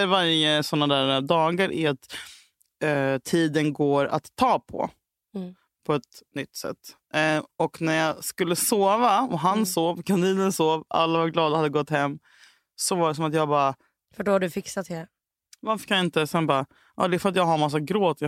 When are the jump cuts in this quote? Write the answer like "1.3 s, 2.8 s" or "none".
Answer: 14.1 s